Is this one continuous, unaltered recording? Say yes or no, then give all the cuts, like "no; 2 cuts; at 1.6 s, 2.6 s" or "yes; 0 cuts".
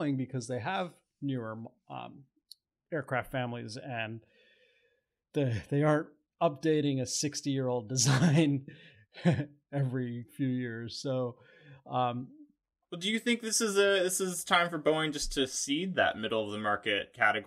yes; 0 cuts